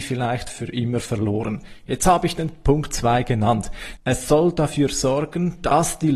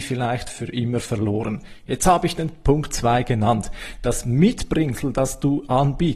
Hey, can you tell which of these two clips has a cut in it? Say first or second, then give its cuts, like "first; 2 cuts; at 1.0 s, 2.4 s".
first; 1 cut; at 4.0 s